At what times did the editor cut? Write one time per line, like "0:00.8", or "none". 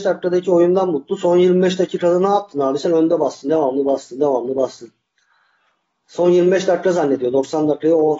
none